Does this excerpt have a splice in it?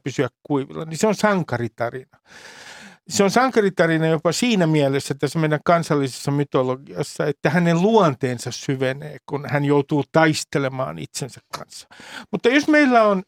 no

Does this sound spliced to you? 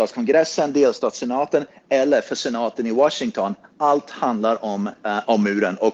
no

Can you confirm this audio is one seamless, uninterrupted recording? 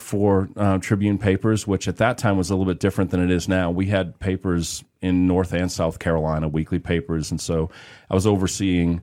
yes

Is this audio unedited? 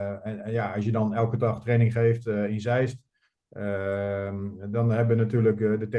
yes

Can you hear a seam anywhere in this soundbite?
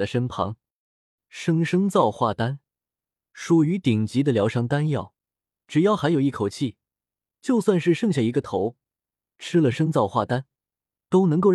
yes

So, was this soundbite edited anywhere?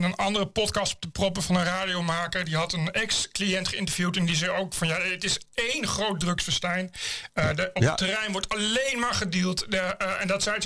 no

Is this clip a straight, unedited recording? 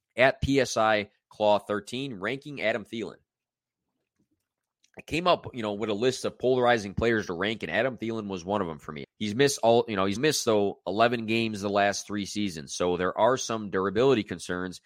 no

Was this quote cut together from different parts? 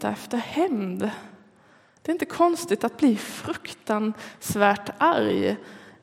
no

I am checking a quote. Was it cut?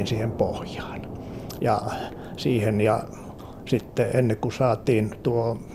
yes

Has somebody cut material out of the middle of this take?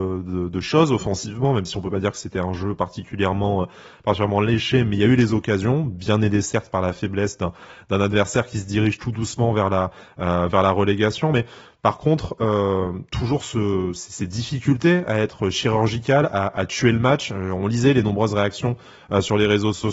no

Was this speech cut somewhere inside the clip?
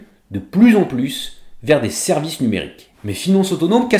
yes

